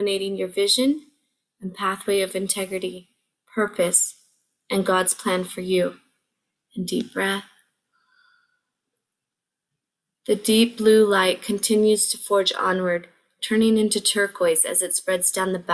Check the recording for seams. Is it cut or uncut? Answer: uncut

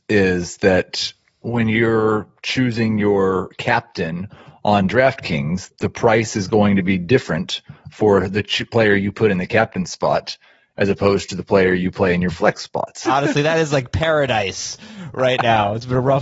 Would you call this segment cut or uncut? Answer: cut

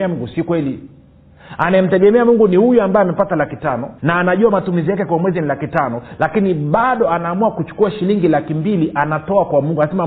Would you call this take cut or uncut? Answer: cut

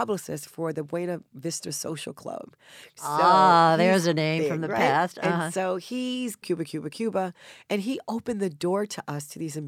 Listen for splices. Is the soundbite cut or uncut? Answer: cut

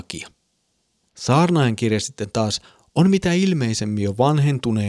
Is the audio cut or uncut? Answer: cut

